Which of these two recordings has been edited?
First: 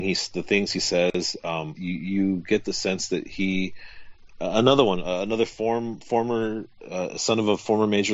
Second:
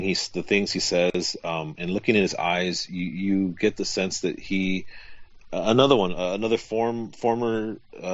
first; 1 cut; at 1.8 s

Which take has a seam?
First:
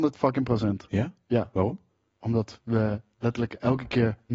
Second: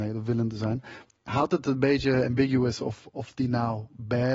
second; 1 cut; at 1.1 s

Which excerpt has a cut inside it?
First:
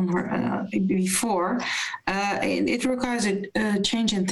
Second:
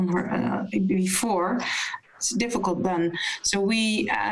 second; 1 cut; at 2.0 s

